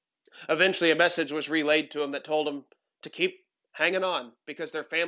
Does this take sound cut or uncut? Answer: uncut